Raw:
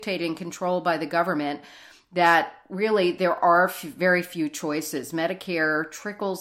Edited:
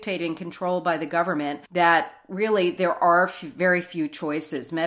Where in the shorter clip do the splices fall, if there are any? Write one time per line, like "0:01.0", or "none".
0:01.7